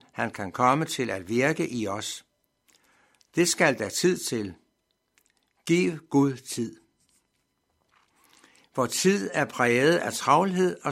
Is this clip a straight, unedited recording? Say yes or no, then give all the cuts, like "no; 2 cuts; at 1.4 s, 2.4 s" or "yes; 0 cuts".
yes; 0 cuts